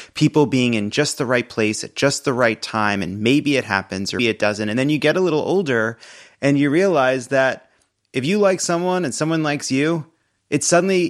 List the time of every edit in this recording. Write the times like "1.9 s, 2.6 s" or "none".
4.2 s